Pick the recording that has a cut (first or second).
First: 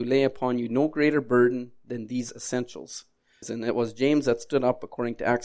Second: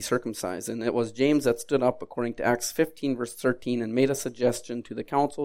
first